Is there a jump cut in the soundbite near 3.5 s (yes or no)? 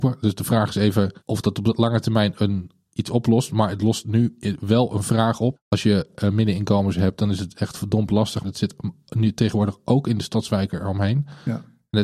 no